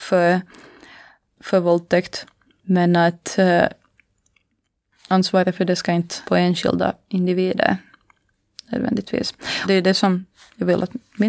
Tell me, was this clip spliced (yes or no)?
yes